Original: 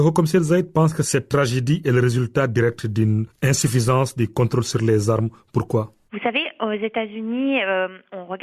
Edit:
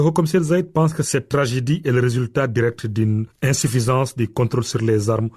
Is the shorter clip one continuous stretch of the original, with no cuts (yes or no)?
yes